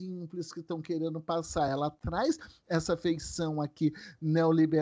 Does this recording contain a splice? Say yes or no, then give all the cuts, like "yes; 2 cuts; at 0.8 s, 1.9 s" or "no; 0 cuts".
no; 0 cuts